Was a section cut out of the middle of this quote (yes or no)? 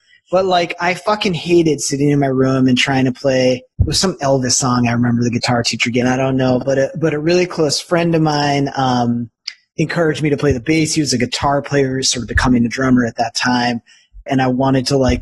yes